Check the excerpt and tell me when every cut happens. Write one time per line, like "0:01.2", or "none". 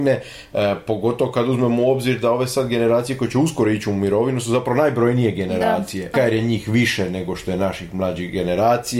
0:06.1